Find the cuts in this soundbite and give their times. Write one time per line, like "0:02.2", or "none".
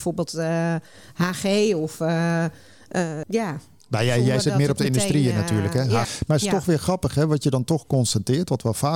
0:03.2
0:06.0